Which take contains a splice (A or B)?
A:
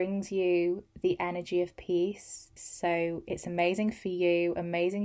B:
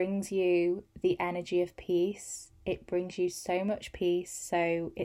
A